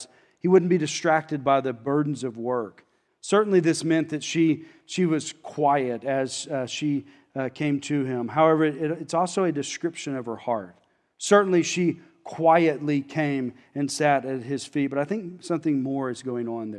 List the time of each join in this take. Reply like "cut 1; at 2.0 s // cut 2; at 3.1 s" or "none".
cut 1; at 3.1 s